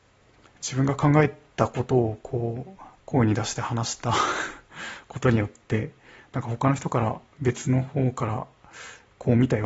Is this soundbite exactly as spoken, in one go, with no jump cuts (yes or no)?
no